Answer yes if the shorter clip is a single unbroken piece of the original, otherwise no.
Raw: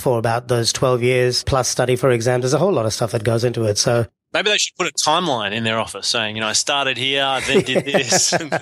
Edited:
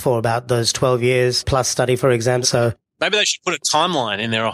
no